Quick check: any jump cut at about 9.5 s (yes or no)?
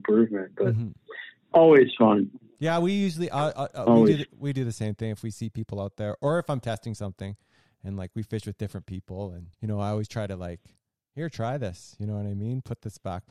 yes